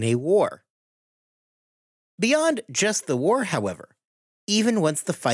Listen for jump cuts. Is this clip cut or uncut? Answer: uncut